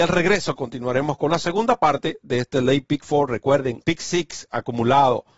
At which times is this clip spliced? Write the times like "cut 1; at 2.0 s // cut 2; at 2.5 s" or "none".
cut 1; at 3.8 s